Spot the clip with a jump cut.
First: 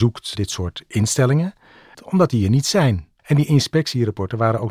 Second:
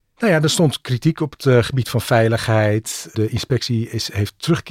first; 2 cuts; at 1.9 s, 3.2 s

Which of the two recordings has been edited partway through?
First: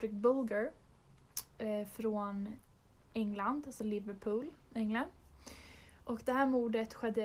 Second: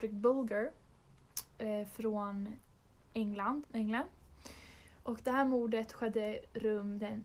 second; 1 cut; at 3.6 s

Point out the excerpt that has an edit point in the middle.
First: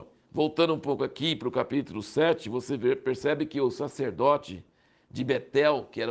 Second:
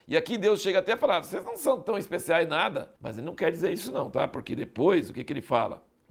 second; 1 cut; at 3.0 s

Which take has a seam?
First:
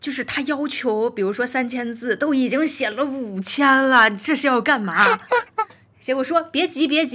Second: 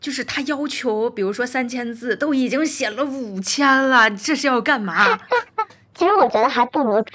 second; 1 cut; at 5.9 s

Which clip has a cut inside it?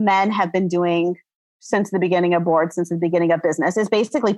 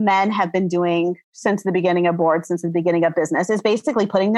second; 1 cut; at 1.2 s

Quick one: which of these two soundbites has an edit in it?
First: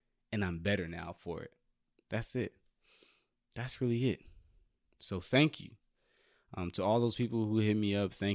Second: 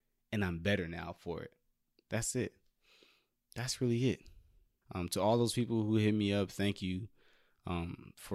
second; 1 cut; at 4.8 s

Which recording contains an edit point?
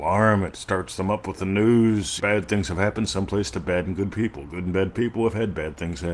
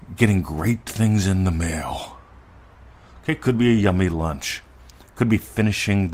first; 1 cut; at 2.2 s

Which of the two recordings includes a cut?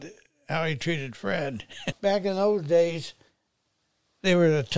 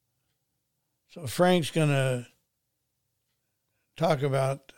first; 1 cut; at 1.9 s

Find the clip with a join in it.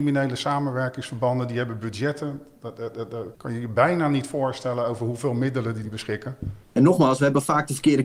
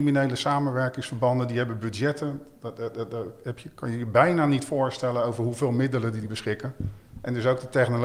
first; 2 cuts; at 3.3 s, 6.6 s

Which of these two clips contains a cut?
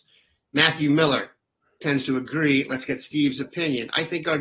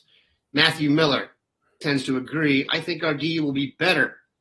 second; 1 cut; at 2.7 s

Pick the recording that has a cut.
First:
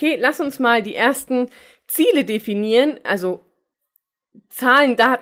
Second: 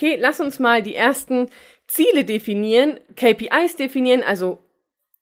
first; 1 cut; at 3.1 s

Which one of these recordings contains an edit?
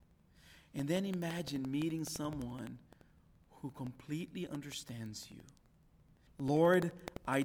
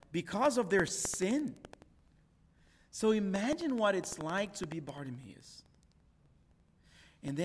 first; 1 cut; at 6.3 s

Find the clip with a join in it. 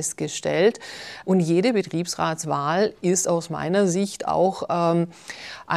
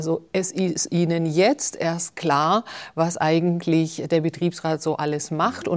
first; 1 cut; at 1.2 s

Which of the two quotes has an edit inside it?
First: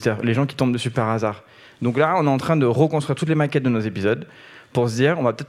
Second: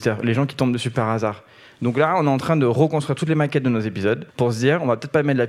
second; 1 cut; at 4.3 s

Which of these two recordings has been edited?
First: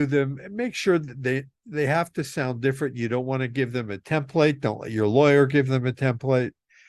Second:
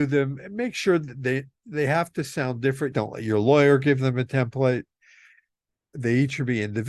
second; 1 cut; at 2.9 s

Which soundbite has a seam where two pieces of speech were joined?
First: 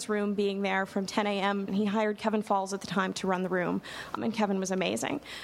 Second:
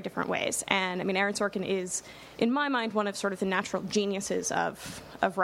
first; 2 cuts; at 1.7 s, 4.2 s

